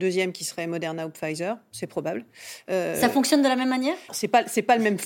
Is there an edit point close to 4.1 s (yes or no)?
yes